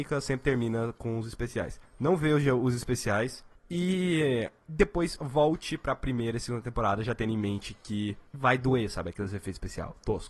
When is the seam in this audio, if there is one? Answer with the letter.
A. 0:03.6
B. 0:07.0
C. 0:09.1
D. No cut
D